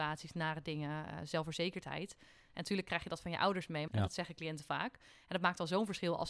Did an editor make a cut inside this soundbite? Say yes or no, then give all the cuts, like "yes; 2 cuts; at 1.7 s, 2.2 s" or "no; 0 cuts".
yes; 1 cut; at 3.9 s